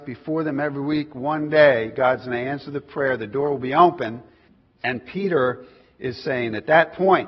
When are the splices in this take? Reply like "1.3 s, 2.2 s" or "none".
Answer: none